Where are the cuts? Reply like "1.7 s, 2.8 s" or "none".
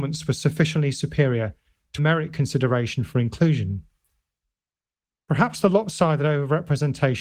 2.0 s